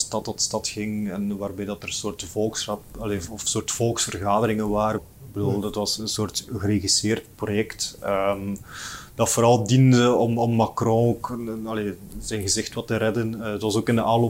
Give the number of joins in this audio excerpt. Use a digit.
1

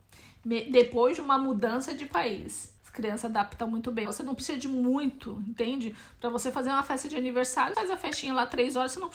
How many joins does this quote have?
3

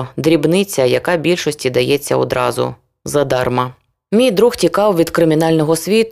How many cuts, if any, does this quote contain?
0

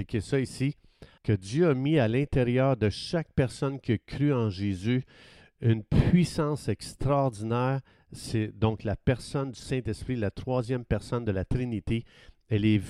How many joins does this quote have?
1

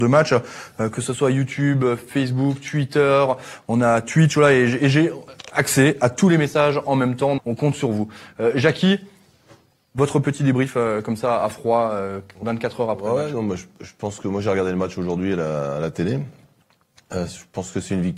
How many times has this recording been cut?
1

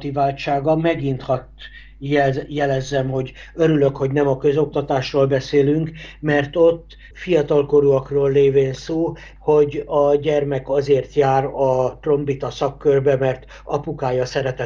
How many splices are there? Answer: 2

